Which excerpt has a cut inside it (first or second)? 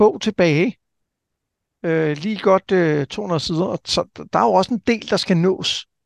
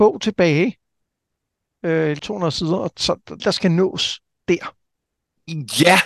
second